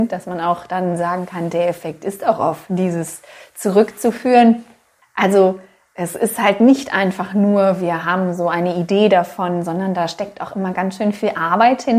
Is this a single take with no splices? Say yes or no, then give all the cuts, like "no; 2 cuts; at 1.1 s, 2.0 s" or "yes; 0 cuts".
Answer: yes; 0 cuts